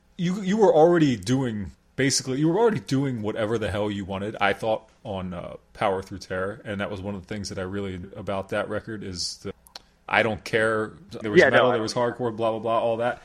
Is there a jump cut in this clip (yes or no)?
yes